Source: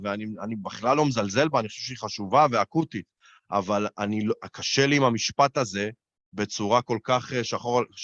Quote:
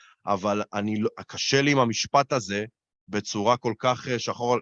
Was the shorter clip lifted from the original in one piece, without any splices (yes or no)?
yes